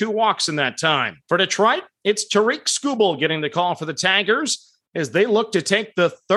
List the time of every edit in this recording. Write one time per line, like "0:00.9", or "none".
0:01.2